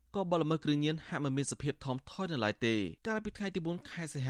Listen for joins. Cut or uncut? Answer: cut